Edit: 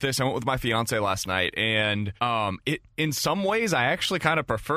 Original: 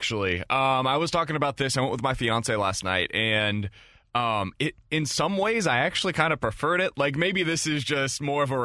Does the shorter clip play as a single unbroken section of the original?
no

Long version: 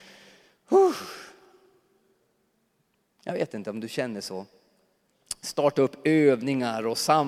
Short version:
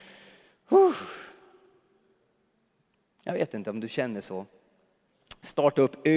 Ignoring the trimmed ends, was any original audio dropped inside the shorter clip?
no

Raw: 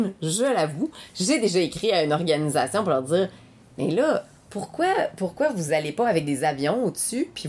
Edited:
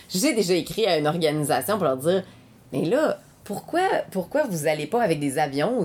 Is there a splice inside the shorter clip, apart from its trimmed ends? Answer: no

